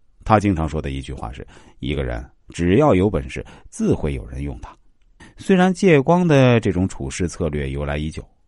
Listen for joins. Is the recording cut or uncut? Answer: cut